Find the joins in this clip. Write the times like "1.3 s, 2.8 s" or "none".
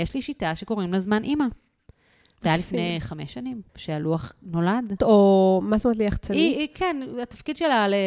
3.7 s, 5.0 s